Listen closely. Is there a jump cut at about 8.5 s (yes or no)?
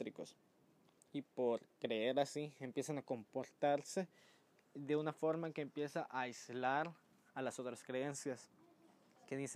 no